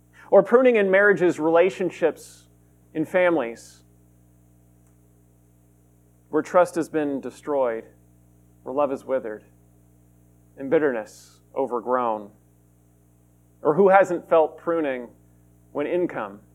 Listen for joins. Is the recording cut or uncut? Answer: uncut